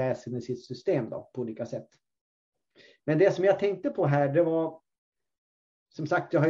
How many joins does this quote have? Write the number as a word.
zero